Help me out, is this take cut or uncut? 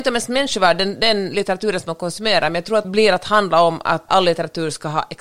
cut